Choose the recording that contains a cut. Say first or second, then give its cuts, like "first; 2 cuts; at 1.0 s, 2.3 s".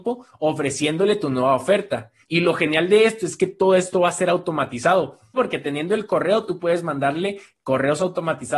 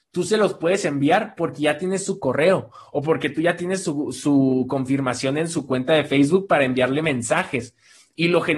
first; 2 cuts; at 2.2 s, 5.4 s